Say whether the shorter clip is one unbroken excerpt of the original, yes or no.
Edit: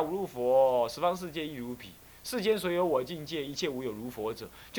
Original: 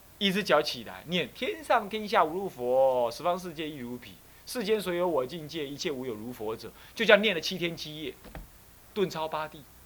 yes